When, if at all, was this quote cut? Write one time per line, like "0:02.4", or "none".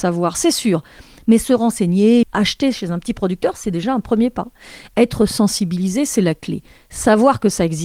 0:02.2